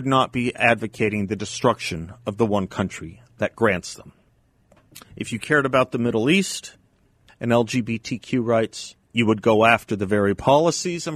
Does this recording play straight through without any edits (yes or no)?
no